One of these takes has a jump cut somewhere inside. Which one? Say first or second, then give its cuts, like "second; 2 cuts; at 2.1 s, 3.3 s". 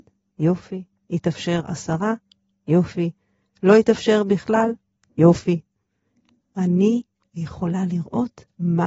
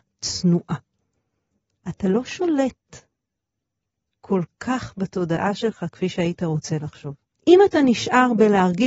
second; 1 cut; at 7.3 s